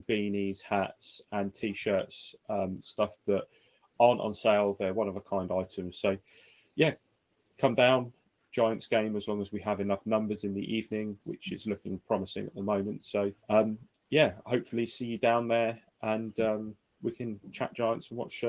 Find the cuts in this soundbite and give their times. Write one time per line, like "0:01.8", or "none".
0:05.9
0:08.5
0:13.4